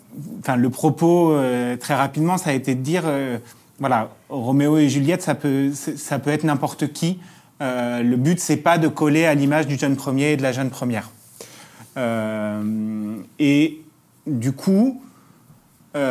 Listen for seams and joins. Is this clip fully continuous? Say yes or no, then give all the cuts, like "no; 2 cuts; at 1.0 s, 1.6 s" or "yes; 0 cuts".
yes; 0 cuts